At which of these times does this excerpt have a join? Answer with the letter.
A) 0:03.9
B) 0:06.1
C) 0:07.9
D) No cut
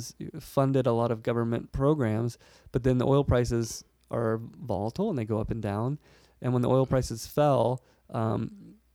D